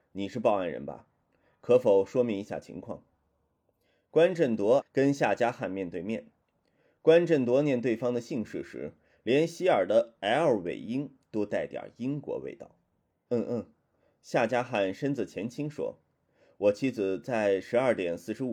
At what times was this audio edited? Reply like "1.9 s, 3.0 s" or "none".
4.8 s

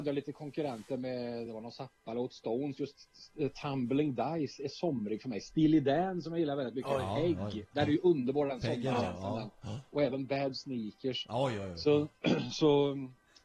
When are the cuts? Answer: none

